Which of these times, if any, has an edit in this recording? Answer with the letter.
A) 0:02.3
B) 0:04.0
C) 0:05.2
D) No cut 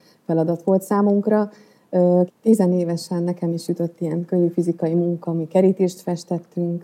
A